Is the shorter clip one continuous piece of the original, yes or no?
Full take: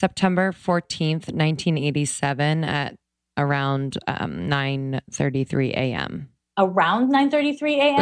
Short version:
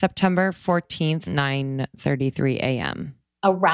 no